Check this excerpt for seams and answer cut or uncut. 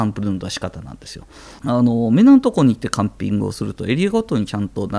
cut